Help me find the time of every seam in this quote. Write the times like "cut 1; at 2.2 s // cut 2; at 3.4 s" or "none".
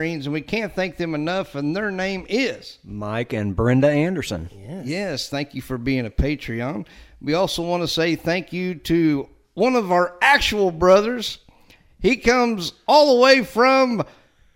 none